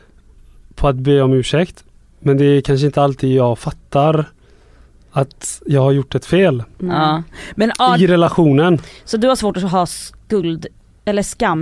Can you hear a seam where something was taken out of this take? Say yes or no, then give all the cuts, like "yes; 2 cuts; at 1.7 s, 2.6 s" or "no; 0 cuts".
no; 0 cuts